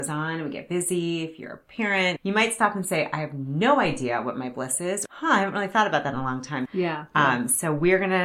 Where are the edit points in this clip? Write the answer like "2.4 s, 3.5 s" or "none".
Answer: 2.2 s, 5.1 s, 6.7 s